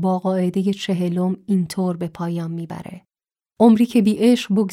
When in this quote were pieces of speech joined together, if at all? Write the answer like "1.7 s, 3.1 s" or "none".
none